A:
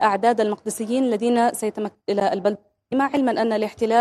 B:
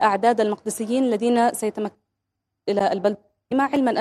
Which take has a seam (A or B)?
A